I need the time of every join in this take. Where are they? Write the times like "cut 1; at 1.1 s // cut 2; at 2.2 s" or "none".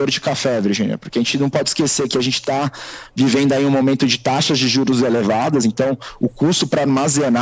none